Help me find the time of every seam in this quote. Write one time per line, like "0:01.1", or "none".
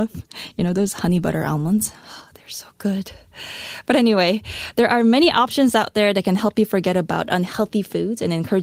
none